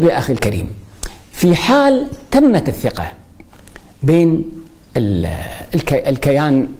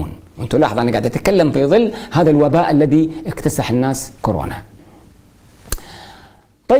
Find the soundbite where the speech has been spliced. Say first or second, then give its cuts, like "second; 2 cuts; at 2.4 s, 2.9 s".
second; 1 cut; at 4.2 s